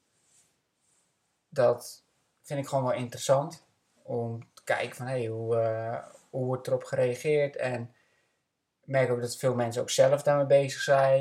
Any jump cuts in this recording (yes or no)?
no